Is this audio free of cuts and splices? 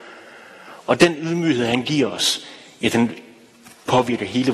yes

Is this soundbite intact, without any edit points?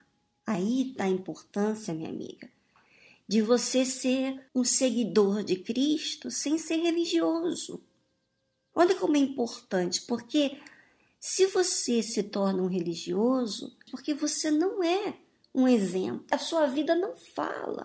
no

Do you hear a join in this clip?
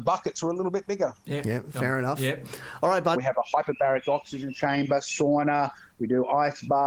yes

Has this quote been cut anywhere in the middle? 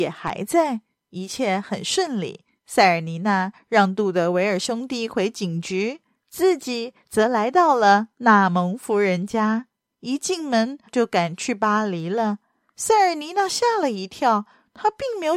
yes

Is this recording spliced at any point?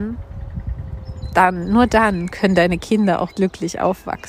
yes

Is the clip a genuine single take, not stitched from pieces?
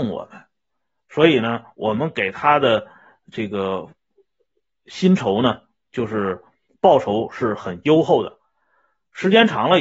yes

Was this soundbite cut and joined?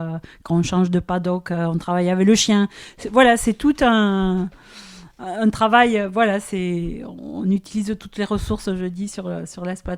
no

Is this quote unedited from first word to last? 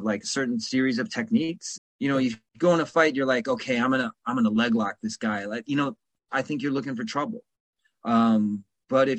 no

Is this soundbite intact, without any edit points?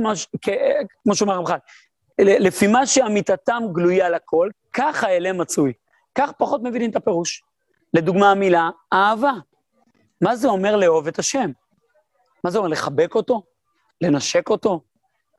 no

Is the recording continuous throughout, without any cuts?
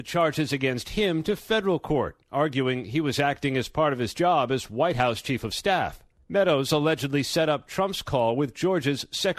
yes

